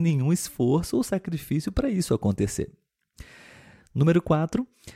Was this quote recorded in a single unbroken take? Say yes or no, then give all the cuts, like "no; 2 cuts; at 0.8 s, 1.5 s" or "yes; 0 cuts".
yes; 0 cuts